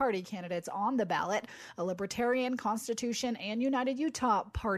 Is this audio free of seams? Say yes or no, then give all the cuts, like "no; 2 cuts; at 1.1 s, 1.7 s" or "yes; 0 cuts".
yes; 0 cuts